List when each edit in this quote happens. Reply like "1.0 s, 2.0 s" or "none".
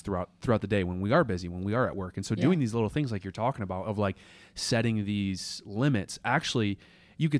none